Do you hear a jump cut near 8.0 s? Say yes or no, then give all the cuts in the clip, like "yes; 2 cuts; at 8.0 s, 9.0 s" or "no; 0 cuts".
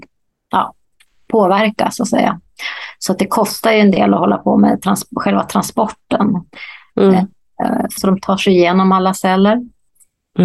yes; 1 cut; at 8.0 s